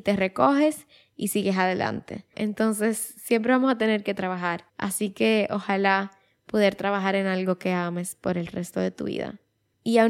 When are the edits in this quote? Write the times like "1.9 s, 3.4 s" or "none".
2.3 s, 4.7 s